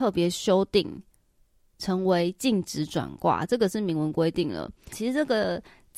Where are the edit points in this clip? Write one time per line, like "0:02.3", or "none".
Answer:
0:04.9